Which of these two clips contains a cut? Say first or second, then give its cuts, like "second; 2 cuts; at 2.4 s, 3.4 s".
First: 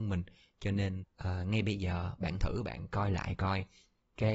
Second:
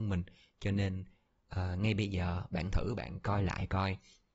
first; 1 cut; at 1.0 s